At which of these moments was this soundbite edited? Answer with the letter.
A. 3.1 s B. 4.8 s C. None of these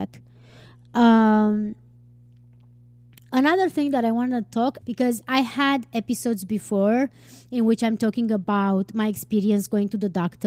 B